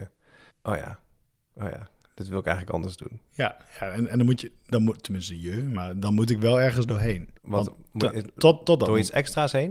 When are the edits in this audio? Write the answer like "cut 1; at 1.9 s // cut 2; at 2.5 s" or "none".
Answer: cut 1; at 7.4 s